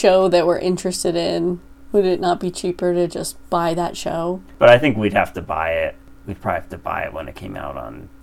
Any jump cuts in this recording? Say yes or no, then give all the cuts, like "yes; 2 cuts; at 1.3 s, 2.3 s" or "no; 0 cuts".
no; 0 cuts